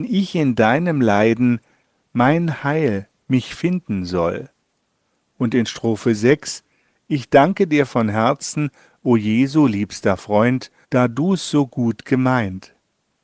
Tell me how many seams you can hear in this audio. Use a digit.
1